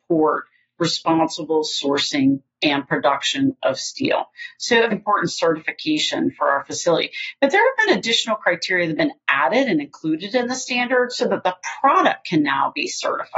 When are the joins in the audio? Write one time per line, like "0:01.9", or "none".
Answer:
0:04.9